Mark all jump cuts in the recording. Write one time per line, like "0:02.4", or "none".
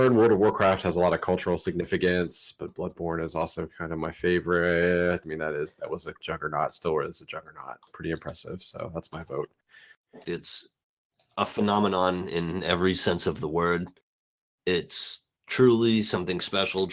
0:05.2
0:10.2